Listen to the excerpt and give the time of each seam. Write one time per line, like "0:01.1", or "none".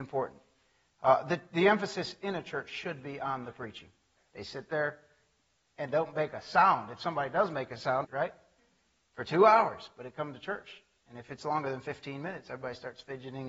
0:04.2
0:08.0